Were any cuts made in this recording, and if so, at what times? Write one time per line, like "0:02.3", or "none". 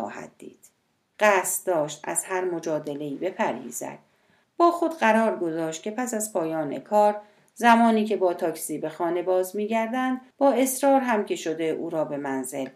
0:01.1
0:04.4
0:10.3